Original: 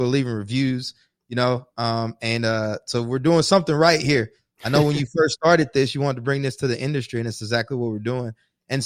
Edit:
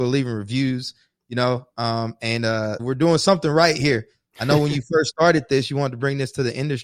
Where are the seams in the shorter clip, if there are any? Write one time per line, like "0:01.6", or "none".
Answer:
0:02.8

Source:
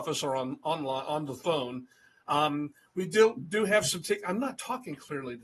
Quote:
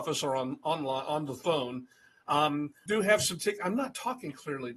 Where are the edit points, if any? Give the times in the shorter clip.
0:02.9

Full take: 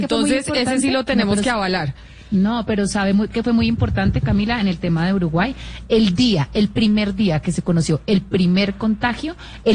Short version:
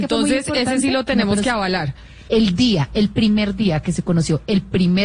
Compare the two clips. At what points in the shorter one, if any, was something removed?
0:02.3

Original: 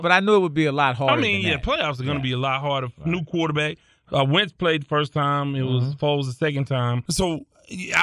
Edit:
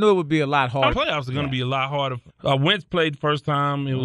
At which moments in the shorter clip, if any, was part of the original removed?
0:00.9
0:02.3

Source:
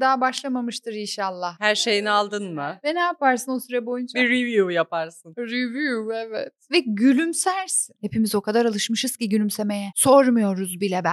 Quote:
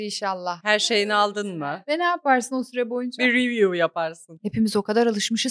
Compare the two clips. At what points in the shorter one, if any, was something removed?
0:04.4

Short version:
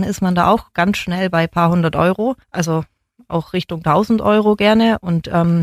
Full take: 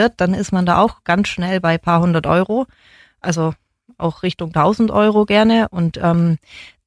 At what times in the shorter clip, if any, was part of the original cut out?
0:02.4

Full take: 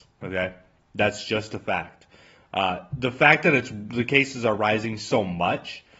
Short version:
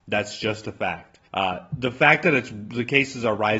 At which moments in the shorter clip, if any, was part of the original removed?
0:01.3

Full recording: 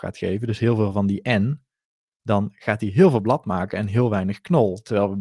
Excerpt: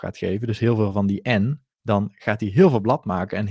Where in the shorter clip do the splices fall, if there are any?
0:01.7

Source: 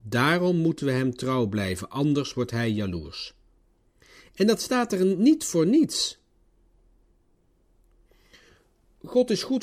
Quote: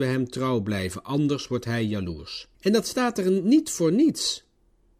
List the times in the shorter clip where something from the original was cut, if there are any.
0:02.5

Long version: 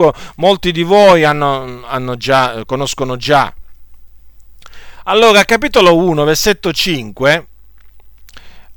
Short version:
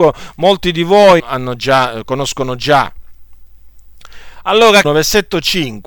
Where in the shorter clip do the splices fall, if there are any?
0:01.2
0:04.8

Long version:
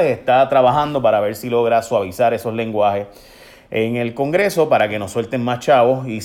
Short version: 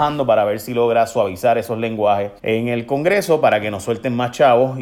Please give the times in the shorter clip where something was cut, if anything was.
0:02.4

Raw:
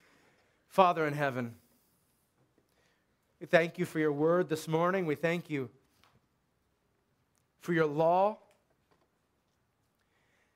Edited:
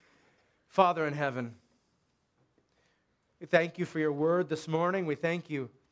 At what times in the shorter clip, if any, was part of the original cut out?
none

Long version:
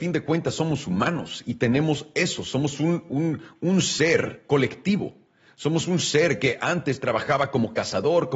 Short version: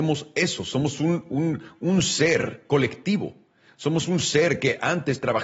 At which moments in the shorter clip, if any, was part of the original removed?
none

